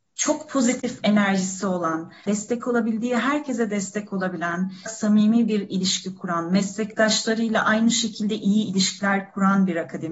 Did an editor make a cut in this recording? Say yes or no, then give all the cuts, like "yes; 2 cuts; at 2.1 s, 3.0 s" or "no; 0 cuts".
yes; 2 cuts; at 2.3 s, 4.9 s